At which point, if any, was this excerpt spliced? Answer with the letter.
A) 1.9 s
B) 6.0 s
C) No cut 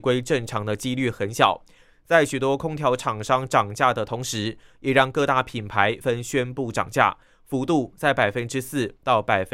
B